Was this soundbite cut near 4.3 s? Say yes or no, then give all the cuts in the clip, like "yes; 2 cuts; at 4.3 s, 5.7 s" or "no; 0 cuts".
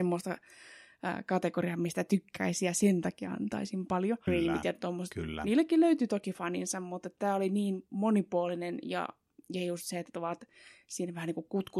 yes; 1 cut; at 4.3 s